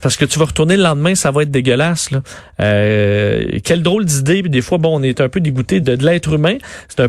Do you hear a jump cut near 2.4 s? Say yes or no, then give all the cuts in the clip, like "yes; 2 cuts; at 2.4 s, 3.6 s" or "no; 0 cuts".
no; 1 cut; at 5.8 s